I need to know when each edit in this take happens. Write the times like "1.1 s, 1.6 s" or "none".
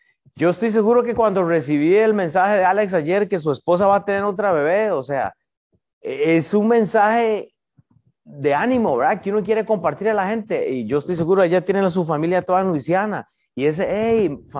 none